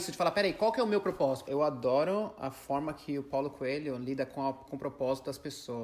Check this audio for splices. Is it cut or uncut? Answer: cut